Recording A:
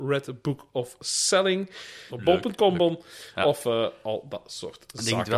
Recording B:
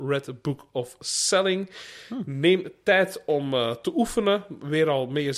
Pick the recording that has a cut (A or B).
A